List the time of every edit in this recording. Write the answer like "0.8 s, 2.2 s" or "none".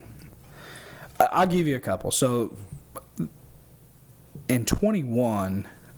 none